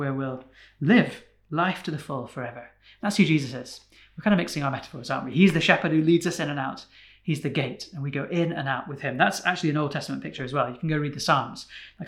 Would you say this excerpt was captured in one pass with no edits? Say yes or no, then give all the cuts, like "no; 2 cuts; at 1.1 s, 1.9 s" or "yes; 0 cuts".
yes; 0 cuts